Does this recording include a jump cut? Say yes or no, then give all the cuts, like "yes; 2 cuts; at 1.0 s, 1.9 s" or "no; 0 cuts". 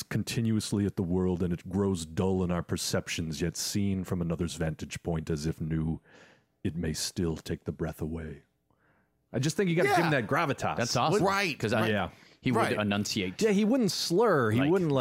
yes; 1 cut; at 11.2 s